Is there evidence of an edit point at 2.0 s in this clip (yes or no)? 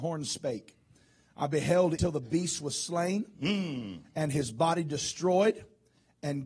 yes